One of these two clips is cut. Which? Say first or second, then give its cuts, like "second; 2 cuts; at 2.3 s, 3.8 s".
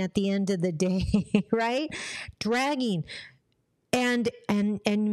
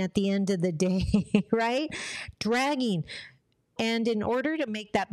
second; 1 cut; at 3.8 s